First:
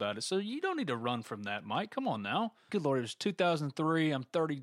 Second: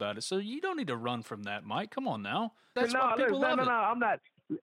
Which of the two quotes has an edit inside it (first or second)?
first